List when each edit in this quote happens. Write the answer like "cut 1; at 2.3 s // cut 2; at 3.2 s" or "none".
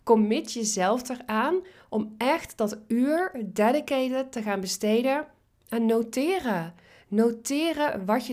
none